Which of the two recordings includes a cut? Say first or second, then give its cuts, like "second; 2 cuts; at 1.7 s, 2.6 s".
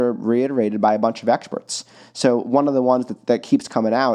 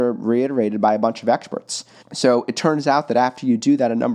second; 1 cut; at 2.0 s